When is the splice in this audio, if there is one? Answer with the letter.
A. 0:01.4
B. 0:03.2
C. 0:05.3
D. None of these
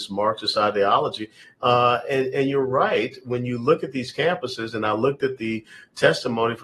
A